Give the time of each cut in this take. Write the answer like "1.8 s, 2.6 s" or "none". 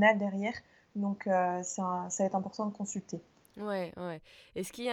none

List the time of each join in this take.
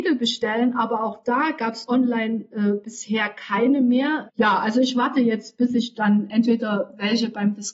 4.3 s

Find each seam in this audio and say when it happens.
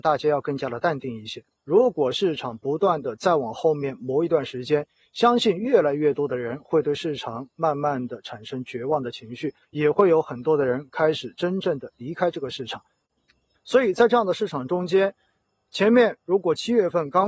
1.6 s, 9.6 s, 13.5 s

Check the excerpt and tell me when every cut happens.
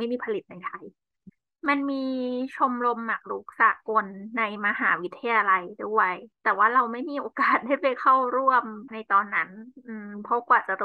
6.3 s

